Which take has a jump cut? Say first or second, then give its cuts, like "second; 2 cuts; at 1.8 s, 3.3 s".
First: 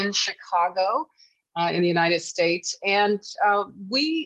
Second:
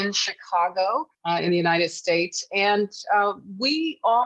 second; 1 cut; at 1.1 s